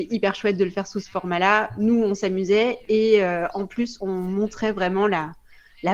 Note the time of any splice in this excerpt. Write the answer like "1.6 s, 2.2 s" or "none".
none